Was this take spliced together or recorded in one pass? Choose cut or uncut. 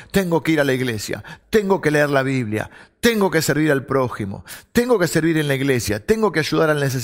cut